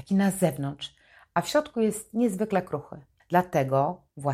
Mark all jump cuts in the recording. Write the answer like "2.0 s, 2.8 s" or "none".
3.2 s

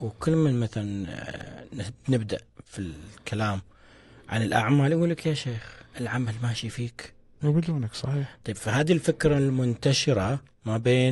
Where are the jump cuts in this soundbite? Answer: 7.4 s

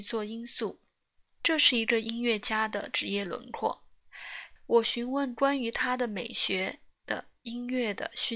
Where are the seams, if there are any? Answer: 4.6 s

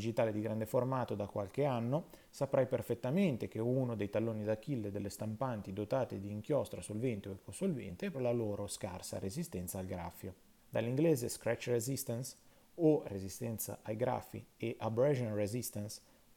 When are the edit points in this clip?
8.1 s, 10.6 s

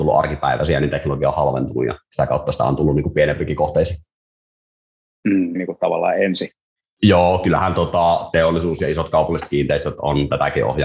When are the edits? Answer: 5.5 s

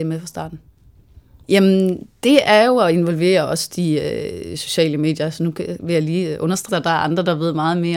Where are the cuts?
1.4 s, 6.7 s

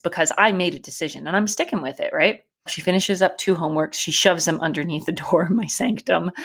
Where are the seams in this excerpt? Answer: 2.7 s

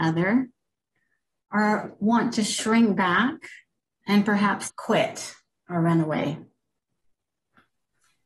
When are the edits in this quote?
4.7 s

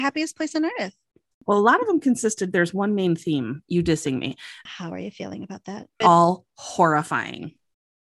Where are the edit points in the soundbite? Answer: 4.7 s, 6.0 s

